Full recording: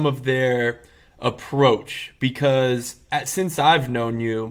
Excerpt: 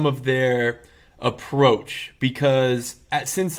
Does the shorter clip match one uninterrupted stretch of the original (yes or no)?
yes